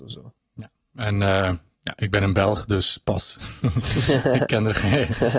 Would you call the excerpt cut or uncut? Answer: uncut